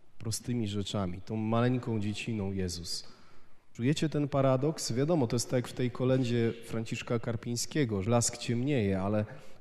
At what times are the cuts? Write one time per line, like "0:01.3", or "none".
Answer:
0:03.8
0:08.1

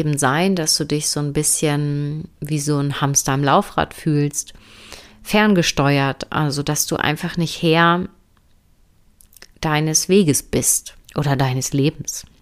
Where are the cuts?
0:11.0

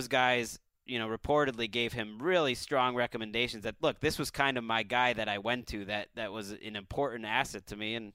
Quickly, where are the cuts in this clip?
none

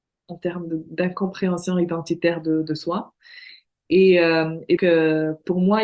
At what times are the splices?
0:04.8

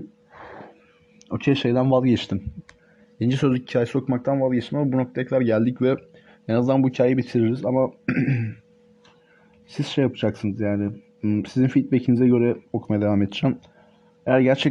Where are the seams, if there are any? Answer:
none

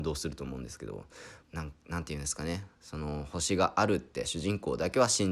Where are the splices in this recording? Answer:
0:01.4

